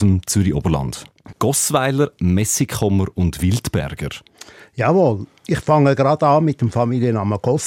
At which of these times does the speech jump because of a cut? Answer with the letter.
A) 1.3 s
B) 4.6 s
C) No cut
A